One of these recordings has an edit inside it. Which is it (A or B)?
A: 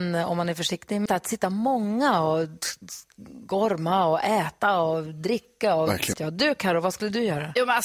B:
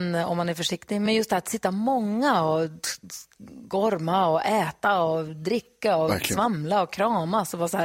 A